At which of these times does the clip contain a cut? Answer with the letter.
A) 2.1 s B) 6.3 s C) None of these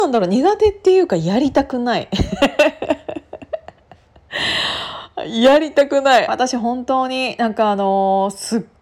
B